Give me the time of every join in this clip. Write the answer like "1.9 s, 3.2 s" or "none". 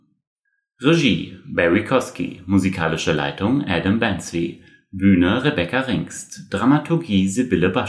none